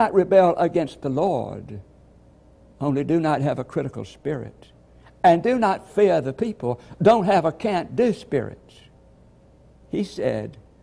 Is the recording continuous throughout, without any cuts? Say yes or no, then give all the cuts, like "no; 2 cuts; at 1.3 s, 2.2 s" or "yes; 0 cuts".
yes; 0 cuts